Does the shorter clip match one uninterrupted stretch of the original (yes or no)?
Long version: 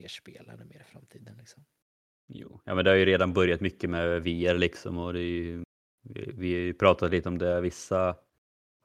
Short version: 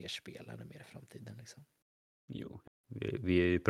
no